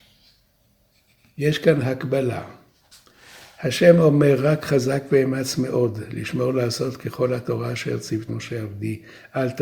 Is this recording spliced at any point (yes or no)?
yes